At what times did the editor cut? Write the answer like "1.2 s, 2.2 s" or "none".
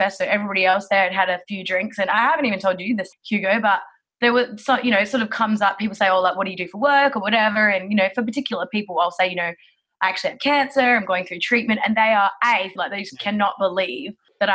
12.8 s

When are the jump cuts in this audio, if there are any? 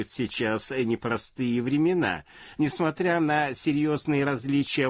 2.6 s

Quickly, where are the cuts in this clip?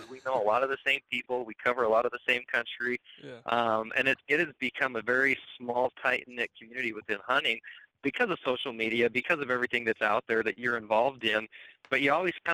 4.3 s

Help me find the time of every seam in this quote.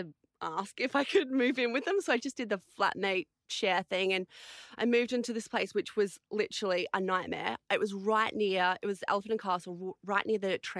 none

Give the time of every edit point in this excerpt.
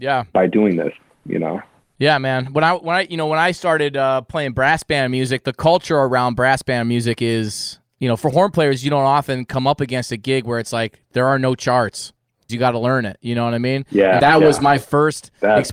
12.5 s, 14.2 s

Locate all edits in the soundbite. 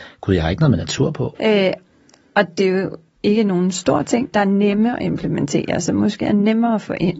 1.3 s, 4.3 s

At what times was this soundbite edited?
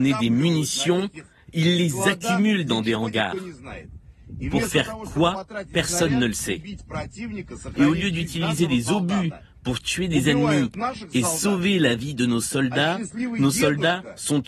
none

